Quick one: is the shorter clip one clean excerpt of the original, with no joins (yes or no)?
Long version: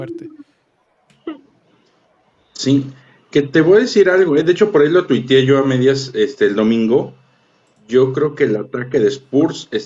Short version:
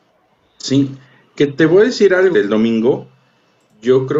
no